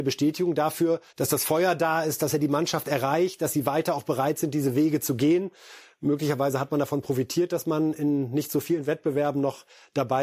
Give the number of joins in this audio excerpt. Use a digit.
1